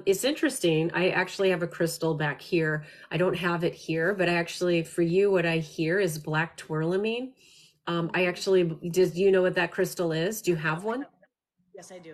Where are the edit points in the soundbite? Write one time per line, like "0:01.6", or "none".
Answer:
none